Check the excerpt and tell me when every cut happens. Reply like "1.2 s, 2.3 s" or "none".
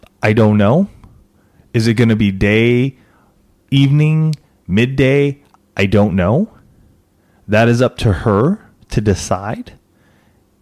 none